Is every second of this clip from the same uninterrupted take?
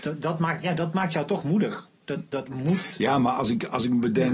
yes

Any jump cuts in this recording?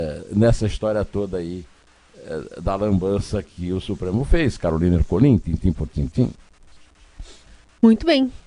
no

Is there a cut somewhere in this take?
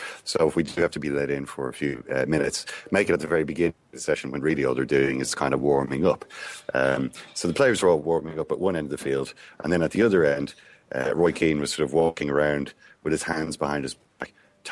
no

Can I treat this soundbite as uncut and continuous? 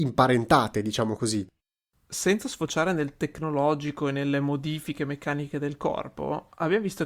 yes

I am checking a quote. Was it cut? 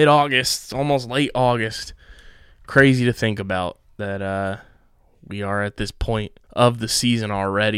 yes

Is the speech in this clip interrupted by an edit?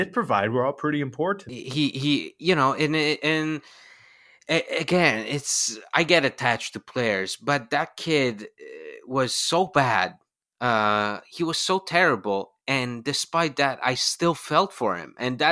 no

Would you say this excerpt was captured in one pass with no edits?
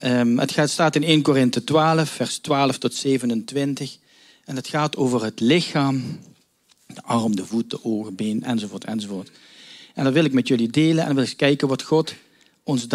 yes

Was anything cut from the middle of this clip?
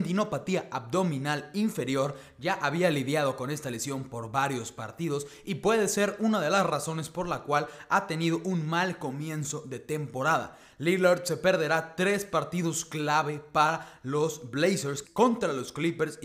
yes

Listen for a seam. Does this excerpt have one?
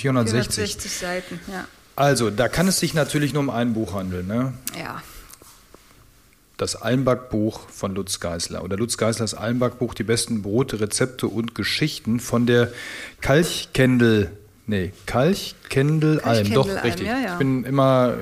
no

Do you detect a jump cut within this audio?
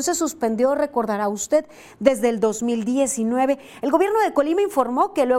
no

